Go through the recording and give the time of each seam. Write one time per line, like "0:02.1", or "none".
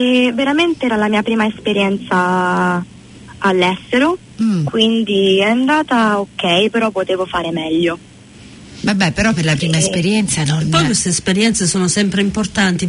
none